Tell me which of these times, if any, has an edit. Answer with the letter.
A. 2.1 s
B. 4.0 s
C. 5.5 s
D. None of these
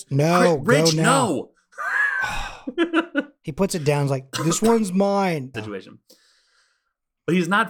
C